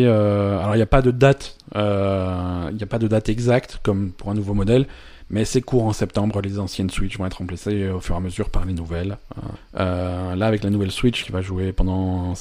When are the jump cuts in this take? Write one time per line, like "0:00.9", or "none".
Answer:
0:09.5
0:11.2